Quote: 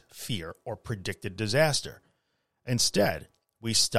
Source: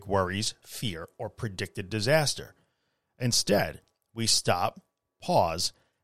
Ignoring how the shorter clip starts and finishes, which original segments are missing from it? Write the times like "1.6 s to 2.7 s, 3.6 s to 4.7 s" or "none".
none